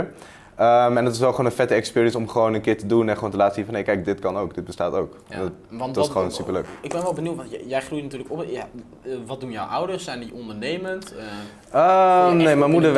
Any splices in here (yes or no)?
yes